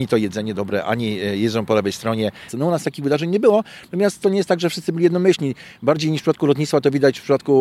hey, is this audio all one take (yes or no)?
no